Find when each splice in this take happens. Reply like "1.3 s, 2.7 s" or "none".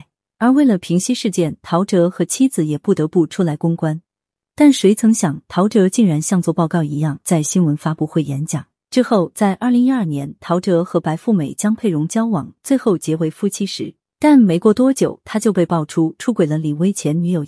7.2 s, 8.8 s, 14.1 s